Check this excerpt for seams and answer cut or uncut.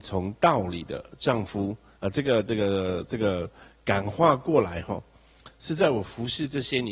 cut